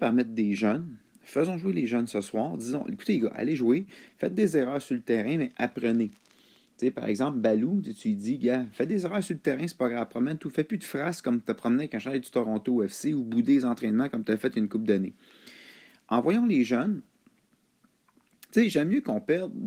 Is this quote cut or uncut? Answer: uncut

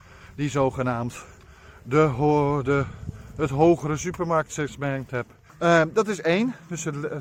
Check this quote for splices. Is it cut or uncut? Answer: cut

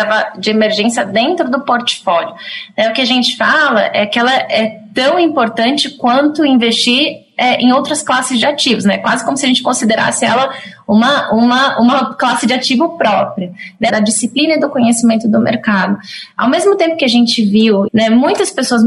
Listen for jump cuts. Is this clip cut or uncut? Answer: cut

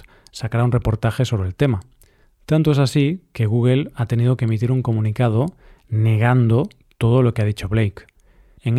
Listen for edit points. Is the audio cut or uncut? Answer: uncut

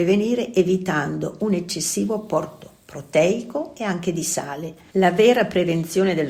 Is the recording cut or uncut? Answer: cut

